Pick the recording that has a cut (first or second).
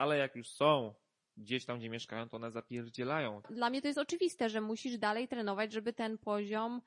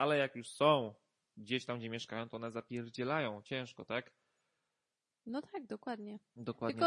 first